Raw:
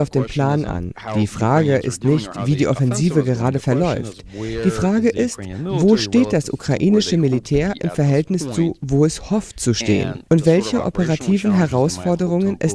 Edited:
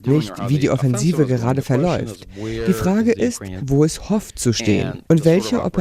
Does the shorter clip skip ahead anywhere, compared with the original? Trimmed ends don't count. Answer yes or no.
yes